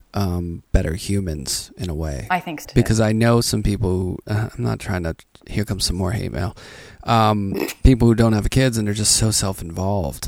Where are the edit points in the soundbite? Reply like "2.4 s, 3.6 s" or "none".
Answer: 2.6 s